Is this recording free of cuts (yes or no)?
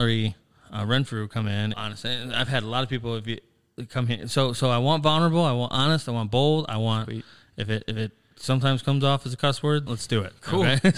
no